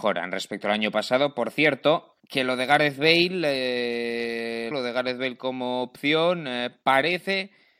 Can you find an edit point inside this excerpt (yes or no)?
yes